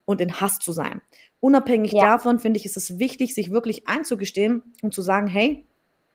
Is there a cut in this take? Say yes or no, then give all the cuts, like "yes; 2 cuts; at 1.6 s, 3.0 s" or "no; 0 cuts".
no; 0 cuts